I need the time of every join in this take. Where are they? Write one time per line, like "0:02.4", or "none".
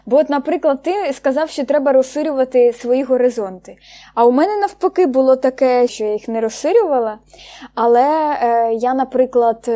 0:05.9